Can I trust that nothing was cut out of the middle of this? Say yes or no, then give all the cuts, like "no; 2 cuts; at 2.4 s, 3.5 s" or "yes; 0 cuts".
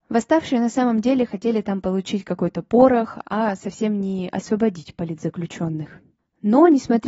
no; 1 cut; at 3.2 s